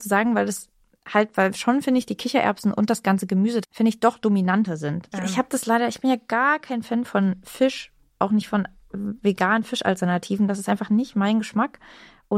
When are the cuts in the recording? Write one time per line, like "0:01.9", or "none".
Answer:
0:03.6
0:05.1